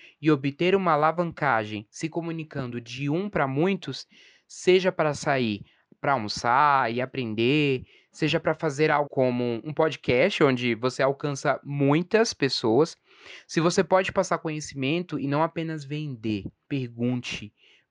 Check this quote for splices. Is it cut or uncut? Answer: cut